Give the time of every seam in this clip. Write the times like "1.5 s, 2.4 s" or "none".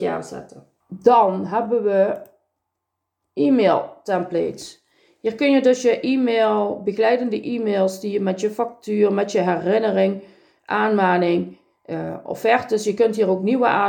none